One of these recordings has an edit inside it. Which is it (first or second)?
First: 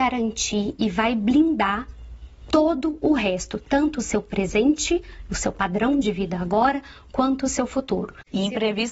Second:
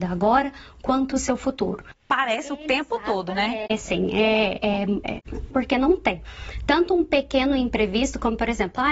second